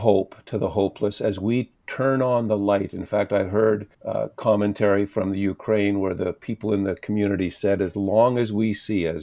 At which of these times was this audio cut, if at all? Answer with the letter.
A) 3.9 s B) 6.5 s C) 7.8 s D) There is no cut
A